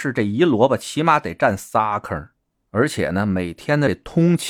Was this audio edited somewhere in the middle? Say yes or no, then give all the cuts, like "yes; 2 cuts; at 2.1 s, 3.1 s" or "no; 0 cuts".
no; 0 cuts